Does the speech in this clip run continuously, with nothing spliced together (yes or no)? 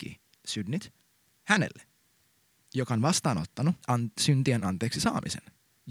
no